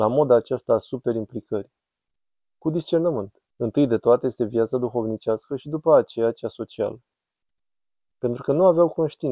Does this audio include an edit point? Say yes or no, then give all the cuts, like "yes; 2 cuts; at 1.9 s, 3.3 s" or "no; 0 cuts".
yes; 2 cuts; at 3.5 s, 8.1 s